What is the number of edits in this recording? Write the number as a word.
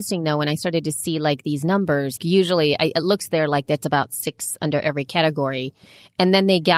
one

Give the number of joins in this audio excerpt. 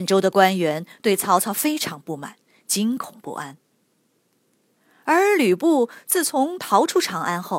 zero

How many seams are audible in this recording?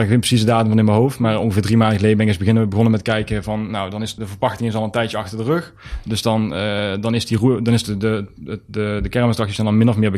one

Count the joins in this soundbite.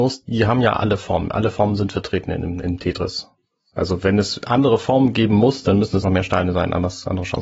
one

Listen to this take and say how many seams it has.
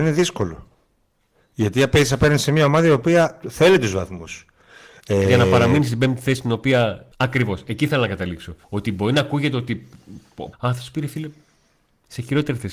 three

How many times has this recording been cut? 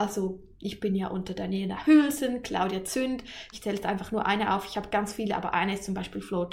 one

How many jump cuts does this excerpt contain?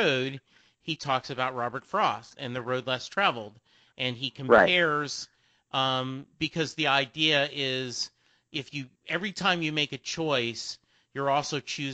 two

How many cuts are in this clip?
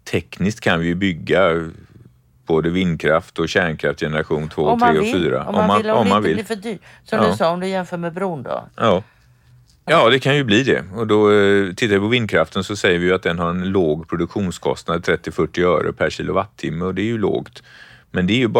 one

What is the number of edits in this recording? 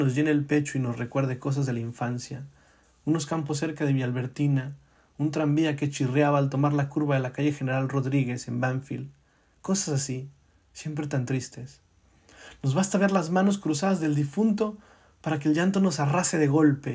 zero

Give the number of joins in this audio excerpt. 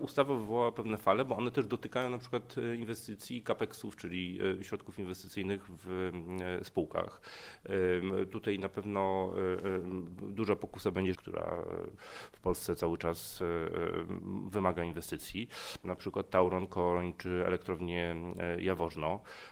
two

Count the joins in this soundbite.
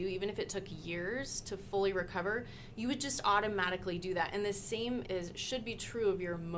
one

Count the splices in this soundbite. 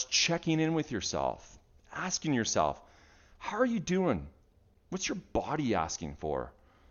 zero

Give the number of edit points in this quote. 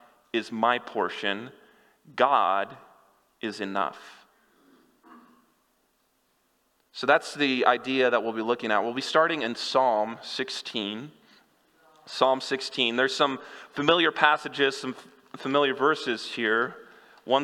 zero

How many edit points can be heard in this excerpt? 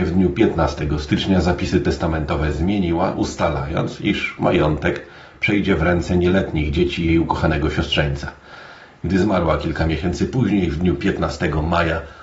zero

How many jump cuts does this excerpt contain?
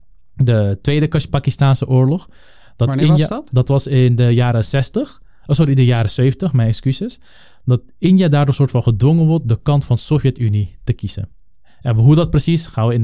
zero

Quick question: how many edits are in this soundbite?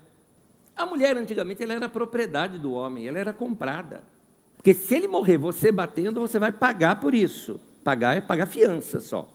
one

